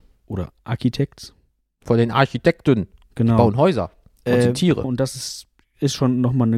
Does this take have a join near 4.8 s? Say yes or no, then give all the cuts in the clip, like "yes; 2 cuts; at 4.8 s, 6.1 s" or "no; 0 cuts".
yes; 1 cut; at 4.8 s